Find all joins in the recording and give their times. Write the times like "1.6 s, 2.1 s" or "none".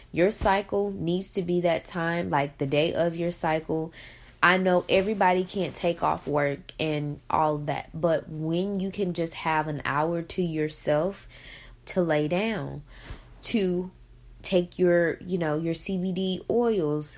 11.8 s